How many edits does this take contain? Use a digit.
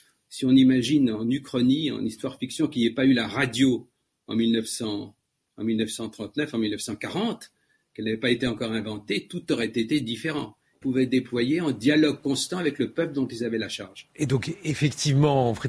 1